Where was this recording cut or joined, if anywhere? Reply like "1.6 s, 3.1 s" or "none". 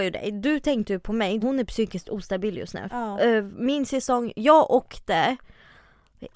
1.4 s, 2.9 s